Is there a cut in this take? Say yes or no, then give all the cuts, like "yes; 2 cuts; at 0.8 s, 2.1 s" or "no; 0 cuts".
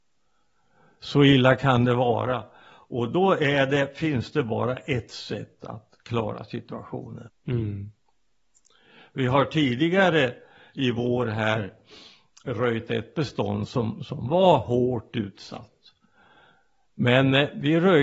yes; 1 cut; at 7.3 s